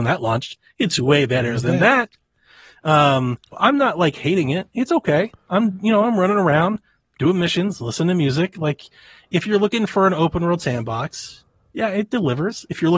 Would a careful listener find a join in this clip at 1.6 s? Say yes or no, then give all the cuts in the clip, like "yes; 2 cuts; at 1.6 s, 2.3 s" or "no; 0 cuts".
no; 1 cut; at 3.5 s